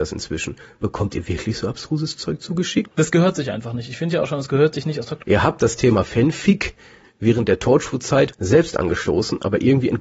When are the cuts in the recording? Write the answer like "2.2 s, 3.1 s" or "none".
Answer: 2.9 s, 5.2 s, 8.3 s